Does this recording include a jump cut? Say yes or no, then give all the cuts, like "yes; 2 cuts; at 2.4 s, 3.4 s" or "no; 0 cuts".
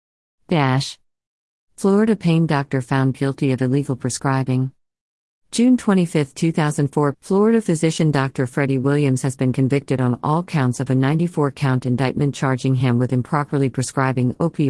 yes; 1 cut; at 7.1 s